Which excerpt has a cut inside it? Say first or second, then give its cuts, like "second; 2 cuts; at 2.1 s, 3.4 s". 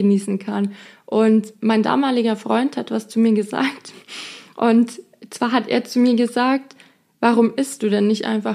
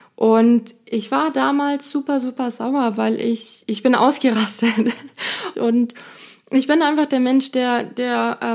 second; 1 cut; at 5.5 s